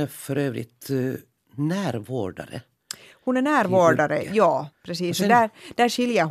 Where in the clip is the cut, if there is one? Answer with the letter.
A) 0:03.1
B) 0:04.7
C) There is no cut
B